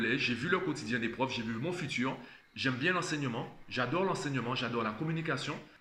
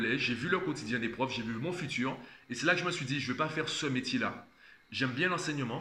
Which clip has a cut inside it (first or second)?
first